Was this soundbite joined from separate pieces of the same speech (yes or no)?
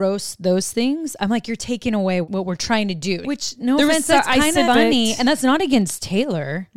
yes